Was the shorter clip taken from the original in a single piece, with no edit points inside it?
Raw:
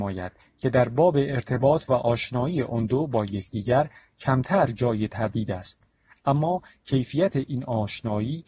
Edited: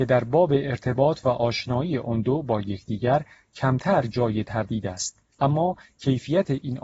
no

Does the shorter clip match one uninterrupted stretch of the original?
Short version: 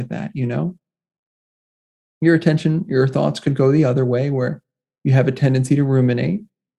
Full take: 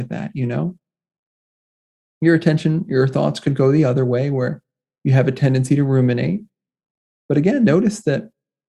yes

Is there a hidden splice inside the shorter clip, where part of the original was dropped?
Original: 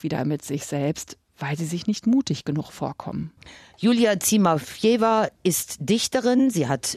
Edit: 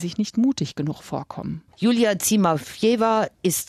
yes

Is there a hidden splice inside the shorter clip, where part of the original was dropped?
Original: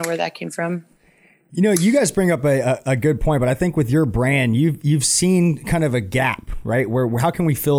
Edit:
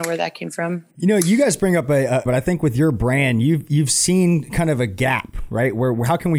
yes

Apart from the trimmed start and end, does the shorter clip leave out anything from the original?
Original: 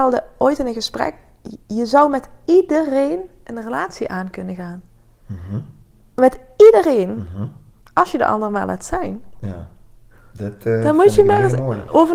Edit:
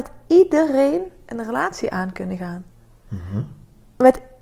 no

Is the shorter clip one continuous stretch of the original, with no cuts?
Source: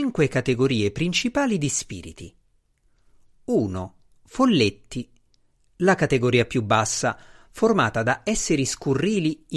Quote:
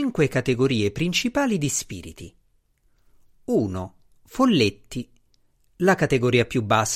yes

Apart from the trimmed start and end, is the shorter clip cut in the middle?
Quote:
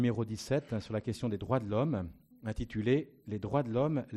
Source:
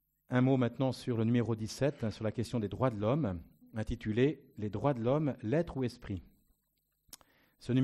no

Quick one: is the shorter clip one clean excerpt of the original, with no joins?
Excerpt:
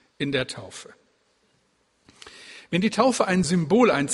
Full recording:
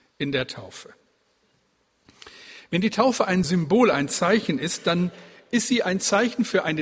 yes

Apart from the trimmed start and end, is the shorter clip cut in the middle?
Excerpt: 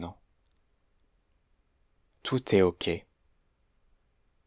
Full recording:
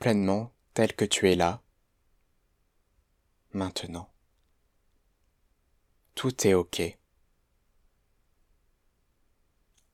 no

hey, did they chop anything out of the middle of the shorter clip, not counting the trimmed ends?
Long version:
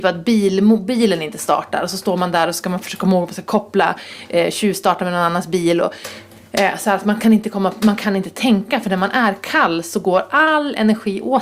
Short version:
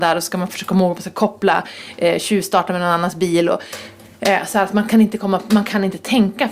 no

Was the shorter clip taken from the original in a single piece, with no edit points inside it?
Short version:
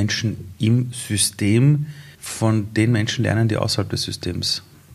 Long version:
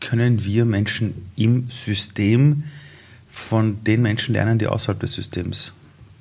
no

